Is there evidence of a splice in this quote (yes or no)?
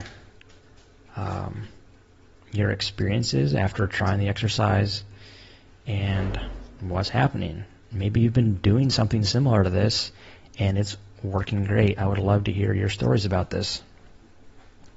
no